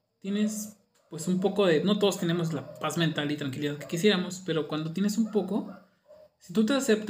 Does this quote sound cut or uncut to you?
uncut